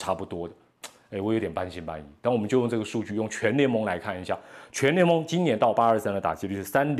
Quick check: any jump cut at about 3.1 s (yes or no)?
no